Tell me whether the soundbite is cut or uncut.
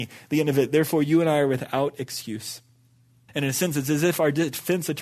cut